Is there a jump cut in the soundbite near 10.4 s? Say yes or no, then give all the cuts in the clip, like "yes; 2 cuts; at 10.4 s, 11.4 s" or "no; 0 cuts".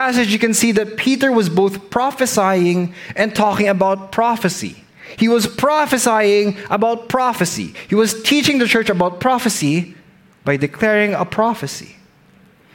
no; 0 cuts